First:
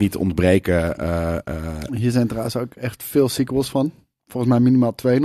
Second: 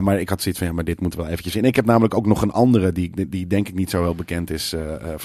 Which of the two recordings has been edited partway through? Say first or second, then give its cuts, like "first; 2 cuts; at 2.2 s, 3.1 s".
first; 1 cut; at 1.9 s